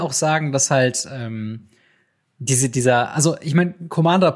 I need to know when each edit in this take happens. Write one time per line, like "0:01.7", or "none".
none